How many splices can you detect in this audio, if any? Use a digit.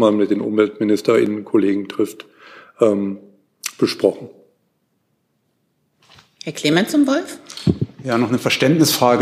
0